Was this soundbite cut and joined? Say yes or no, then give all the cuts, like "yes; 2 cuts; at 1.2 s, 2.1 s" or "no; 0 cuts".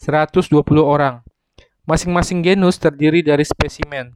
yes; 1 cut; at 1.7 s